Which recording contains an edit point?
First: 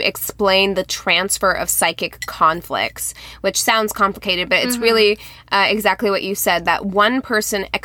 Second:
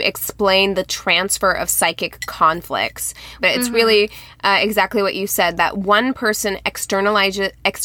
second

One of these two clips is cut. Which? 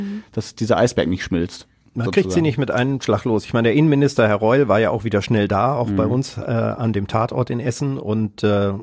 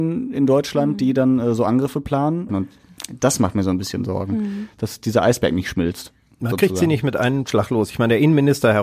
second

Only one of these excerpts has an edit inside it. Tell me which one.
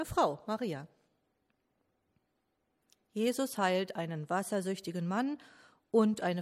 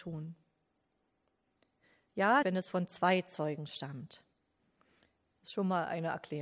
second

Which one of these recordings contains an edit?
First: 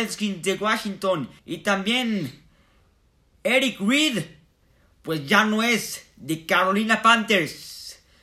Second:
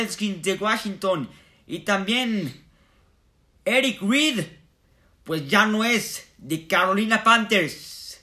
first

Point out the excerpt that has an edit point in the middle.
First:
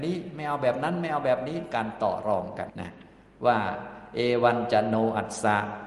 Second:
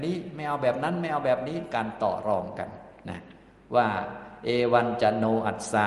first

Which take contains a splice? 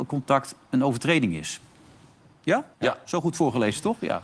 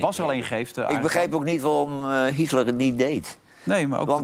first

